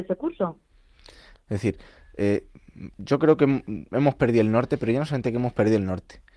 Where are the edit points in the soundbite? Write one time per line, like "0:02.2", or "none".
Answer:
0:01.4